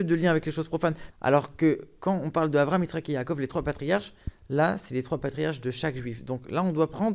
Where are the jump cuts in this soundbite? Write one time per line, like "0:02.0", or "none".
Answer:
0:01.1